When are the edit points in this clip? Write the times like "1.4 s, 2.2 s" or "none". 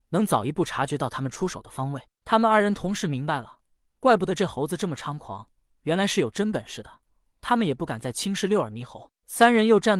none